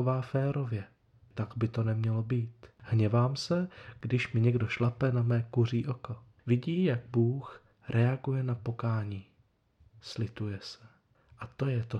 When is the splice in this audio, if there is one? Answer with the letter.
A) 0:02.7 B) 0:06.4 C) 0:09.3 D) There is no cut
B